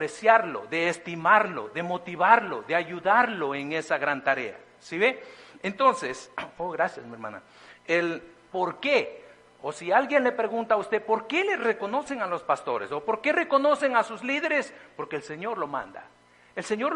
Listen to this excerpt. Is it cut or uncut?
cut